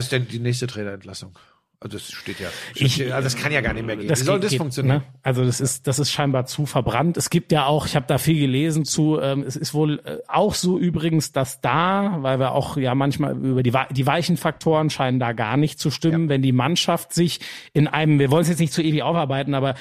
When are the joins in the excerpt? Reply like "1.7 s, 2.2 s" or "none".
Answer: none